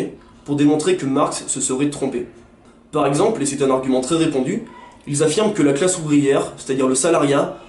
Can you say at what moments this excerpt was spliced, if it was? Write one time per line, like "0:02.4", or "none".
none

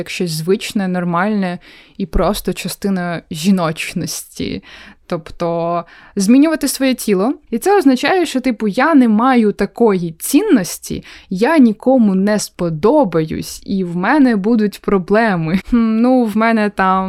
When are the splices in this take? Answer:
0:07.5
0:15.6

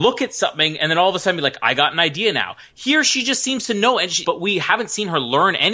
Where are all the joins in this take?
0:04.2

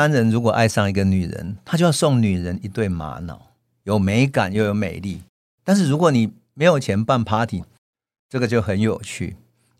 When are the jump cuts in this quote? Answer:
0:03.8
0:07.6

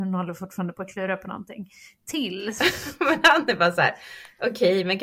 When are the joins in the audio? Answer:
0:02.6

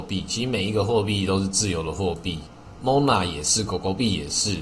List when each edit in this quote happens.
none

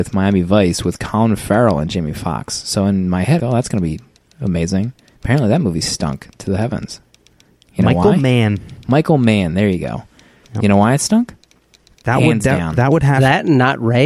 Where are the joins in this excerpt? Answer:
0:03.4
0:12.0

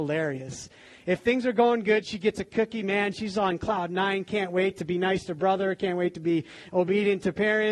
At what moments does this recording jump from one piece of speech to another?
none

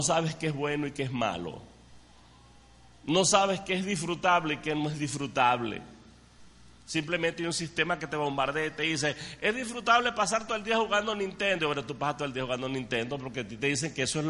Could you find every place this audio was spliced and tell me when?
none

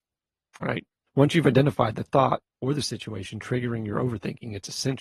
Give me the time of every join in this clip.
0:01.1
0:02.5

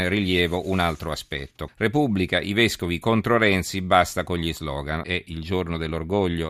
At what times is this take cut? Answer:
0:01.7
0:05.0

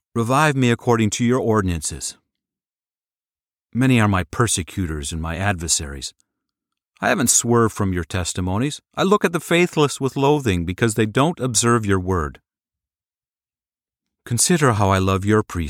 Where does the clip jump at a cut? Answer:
0:08.9

